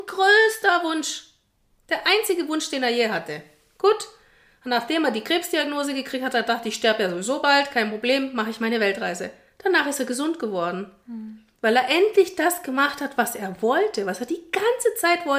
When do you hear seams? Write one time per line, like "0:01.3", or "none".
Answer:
none